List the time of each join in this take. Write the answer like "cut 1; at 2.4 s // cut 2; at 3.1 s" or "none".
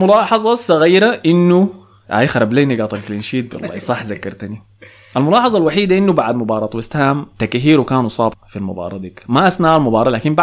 cut 1; at 8.3 s